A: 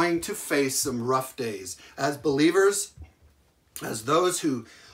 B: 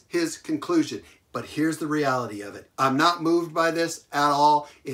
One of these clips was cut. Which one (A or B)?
B